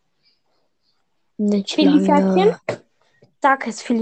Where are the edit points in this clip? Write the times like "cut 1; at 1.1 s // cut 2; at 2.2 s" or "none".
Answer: cut 1; at 2.6 s